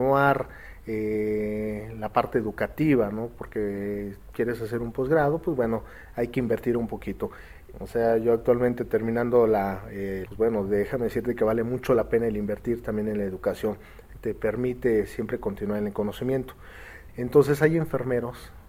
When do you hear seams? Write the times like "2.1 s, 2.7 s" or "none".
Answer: 7.7 s, 10.3 s, 17.1 s